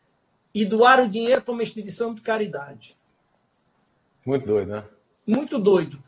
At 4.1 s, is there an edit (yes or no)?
yes